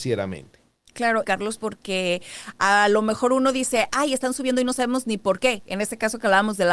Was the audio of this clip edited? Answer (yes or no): yes